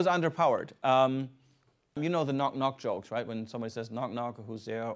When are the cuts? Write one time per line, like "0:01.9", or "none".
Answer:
0:02.0

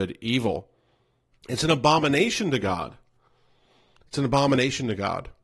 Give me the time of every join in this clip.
0:01.3

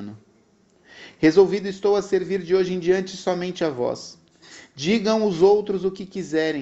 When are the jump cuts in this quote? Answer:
none

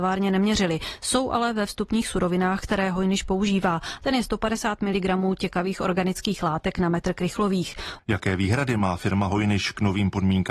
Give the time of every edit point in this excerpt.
0:04.0
0:08.0

